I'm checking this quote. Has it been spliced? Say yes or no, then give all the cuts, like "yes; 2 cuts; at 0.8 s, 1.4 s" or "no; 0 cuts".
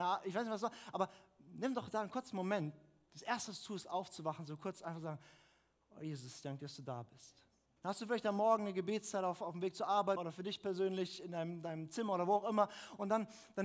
yes; 2 cuts; at 7.8 s, 10.2 s